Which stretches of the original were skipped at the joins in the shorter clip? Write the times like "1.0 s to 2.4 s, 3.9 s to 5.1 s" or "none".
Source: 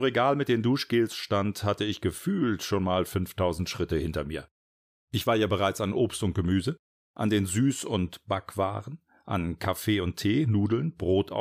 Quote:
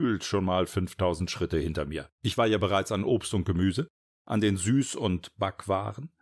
4.5 s to 5.0 s